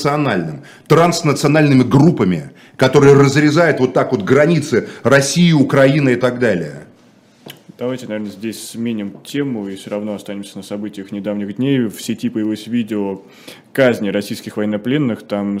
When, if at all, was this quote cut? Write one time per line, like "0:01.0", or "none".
none